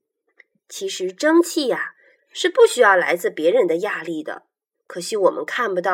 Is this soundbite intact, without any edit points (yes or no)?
no